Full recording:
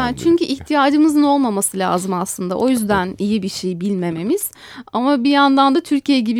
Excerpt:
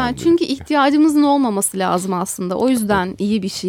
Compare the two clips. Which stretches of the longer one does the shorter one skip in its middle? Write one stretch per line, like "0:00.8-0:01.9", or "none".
none